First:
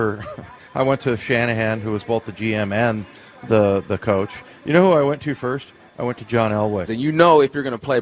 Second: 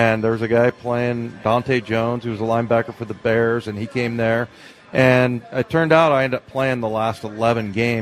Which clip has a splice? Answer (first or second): first